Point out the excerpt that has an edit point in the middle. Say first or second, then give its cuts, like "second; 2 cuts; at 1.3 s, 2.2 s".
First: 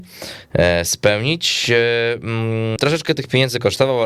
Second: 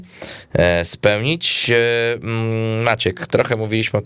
first; 1 cut; at 2.8 s